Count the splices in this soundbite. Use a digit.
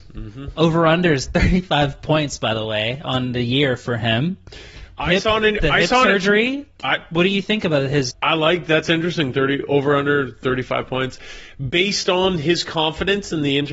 1